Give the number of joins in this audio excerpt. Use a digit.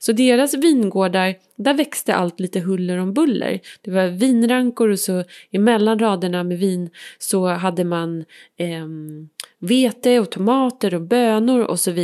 0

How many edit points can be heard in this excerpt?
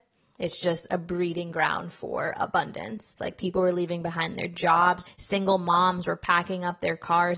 2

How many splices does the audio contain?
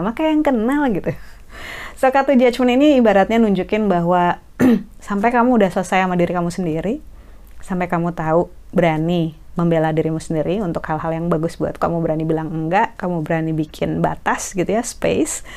1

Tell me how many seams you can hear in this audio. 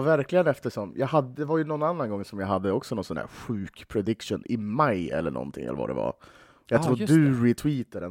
0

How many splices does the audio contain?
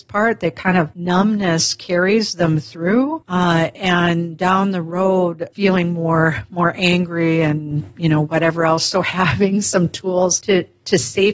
0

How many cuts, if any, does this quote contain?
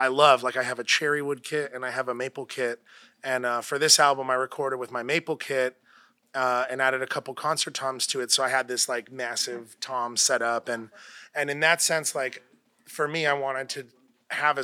0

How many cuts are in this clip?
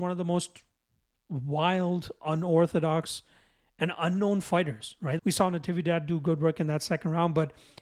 1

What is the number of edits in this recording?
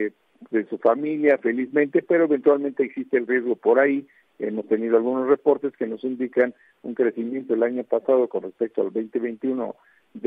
0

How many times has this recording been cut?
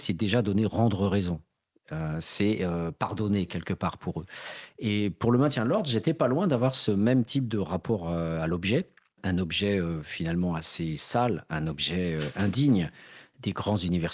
0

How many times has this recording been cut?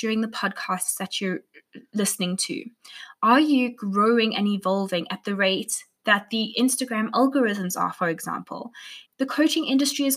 1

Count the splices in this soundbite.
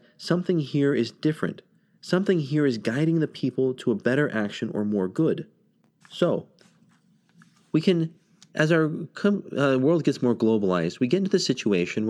1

